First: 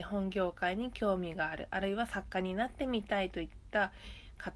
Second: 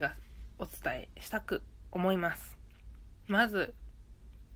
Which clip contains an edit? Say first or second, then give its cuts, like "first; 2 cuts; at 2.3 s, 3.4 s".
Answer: second; 1 cut; at 3.2 s